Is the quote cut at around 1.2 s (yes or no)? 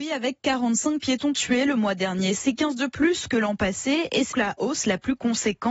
no